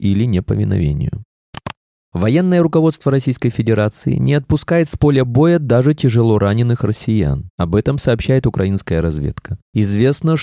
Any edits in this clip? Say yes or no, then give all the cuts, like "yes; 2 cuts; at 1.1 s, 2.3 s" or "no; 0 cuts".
no; 0 cuts